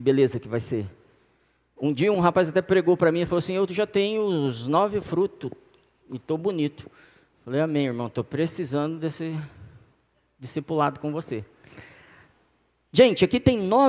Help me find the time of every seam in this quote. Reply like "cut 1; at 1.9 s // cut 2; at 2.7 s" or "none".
cut 1; at 2.1 s